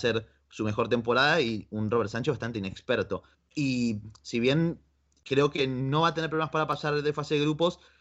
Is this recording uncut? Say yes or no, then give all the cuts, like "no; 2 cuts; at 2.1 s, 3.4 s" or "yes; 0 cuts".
no; 1 cut; at 3.3 s